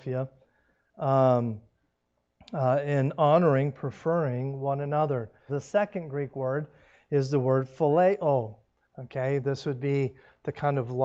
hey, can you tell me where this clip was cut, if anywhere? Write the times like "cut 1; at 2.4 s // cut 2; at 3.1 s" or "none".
cut 1; at 5.5 s // cut 2; at 8.8 s